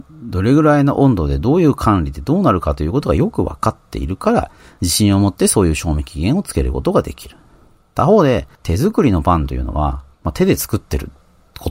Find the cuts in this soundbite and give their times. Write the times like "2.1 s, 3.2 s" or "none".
8.5 s, 10.1 s